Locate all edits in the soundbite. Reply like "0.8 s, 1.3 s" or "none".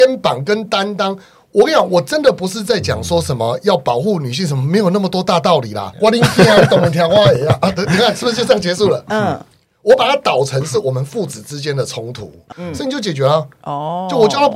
5.9 s, 12.5 s

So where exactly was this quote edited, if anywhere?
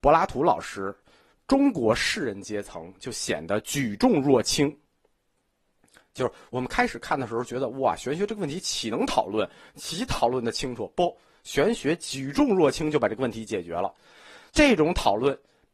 14.5 s

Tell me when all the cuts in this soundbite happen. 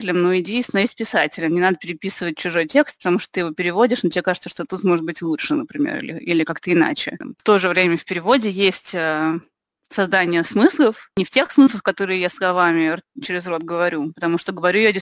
none

